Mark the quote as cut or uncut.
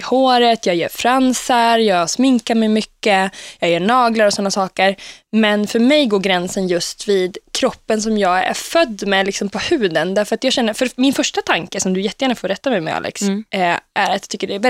uncut